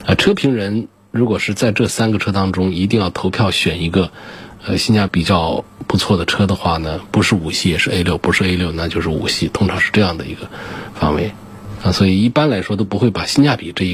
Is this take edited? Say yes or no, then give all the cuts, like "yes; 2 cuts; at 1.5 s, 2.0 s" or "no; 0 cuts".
yes; 1 cut; at 5.1 s